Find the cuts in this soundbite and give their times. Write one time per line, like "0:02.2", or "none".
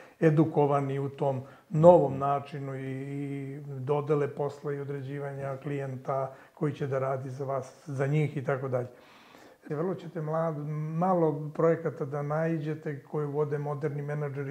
0:09.7

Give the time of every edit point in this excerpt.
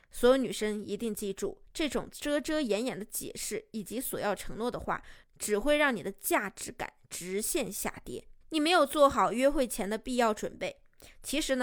0:08.4

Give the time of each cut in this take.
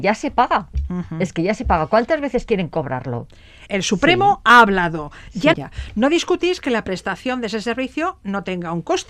0:03.7
0:05.5

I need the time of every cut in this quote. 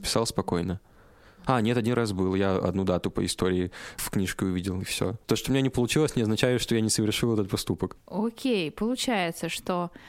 0:07.9

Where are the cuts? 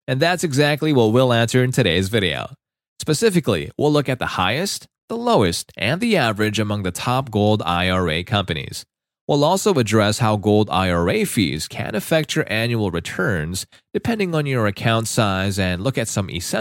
none

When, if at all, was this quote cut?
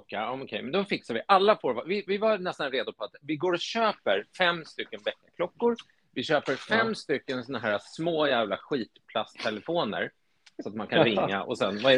none

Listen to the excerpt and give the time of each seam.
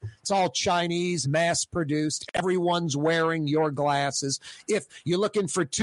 0:01.2

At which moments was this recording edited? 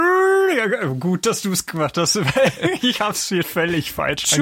0:03.4

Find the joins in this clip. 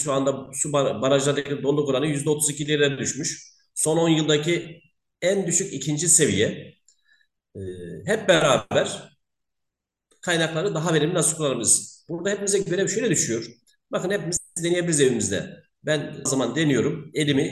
0:16.3

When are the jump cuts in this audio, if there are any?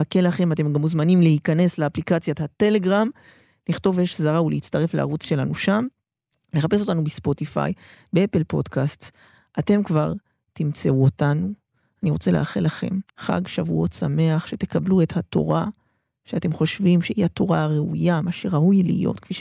0:13.1

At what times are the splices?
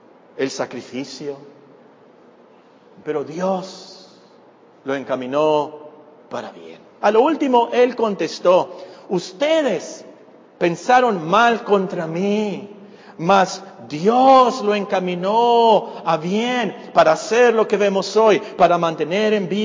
0:03.0
0:07.0

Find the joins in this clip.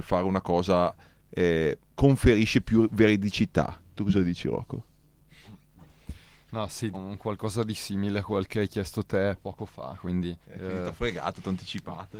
0:06.9
0:10.4

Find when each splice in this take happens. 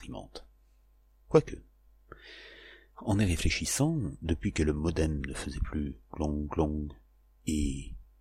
none

